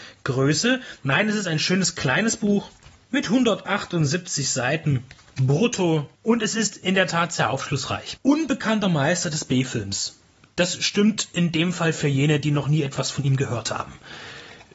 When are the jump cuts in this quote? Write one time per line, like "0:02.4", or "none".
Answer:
0:01.0